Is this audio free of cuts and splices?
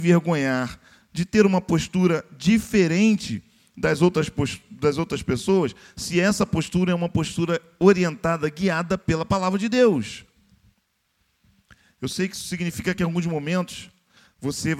yes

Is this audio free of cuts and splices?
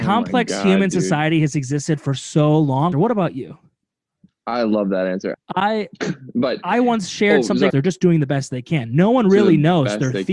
no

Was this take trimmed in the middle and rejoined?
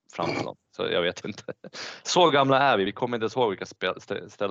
no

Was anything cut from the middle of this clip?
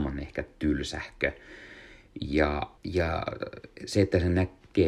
yes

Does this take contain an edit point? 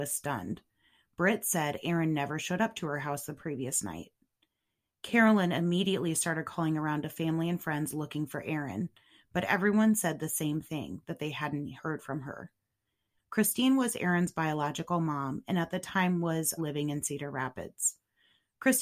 yes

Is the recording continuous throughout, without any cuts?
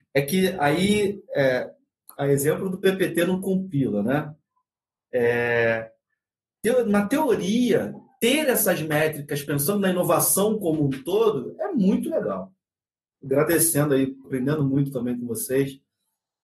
no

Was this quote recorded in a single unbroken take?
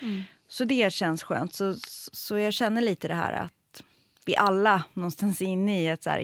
yes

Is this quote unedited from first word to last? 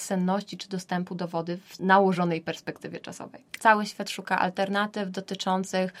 no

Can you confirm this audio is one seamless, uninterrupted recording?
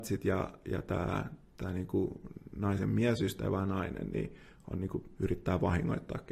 no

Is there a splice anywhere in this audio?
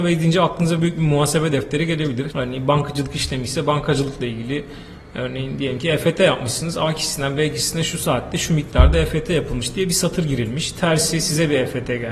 yes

